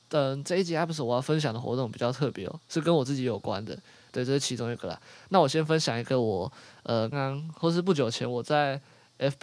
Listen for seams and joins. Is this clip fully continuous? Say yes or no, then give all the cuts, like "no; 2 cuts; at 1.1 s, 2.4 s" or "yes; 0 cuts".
no; 1 cut; at 7.1 s